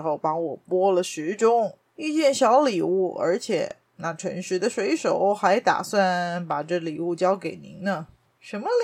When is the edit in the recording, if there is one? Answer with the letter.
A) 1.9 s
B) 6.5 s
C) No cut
A